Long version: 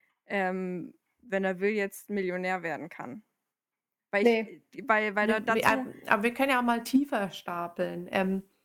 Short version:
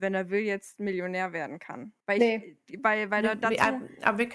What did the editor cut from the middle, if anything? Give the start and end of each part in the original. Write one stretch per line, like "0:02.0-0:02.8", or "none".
0:03.3-0:04.0